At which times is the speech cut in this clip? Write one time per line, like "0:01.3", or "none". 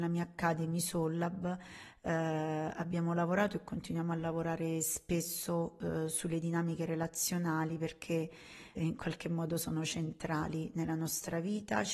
0:08.7